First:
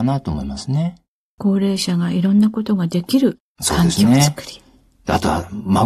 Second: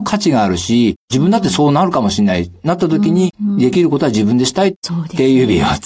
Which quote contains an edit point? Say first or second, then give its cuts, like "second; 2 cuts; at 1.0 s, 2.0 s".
second; 2 cuts; at 3.3 s, 4.8 s